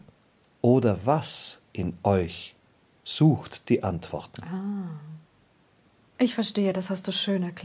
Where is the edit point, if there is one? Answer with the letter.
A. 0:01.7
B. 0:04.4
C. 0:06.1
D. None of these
C